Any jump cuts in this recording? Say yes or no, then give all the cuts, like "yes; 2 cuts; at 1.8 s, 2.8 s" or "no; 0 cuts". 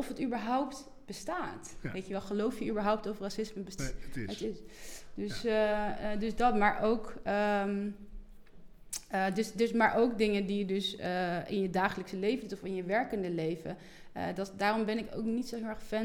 yes; 1 cut; at 3.8 s